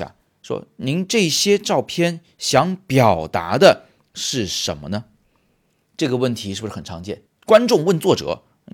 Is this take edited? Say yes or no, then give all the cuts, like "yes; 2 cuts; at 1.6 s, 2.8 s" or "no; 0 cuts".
yes; 1 cut; at 7.3 s